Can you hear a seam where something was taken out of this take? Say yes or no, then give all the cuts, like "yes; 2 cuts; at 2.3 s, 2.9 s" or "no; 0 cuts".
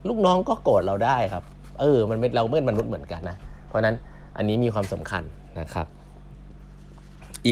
yes; 1 cut; at 3.2 s